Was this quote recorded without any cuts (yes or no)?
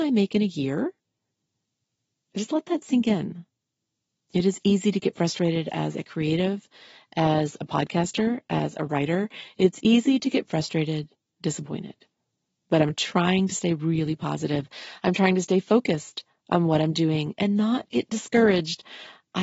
no